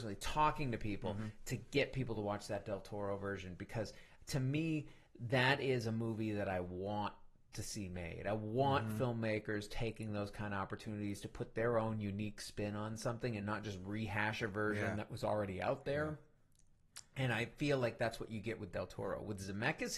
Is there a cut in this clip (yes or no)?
no